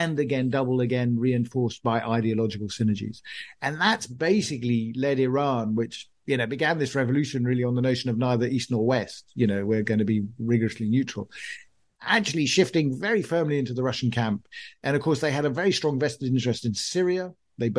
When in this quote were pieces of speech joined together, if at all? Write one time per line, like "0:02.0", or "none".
none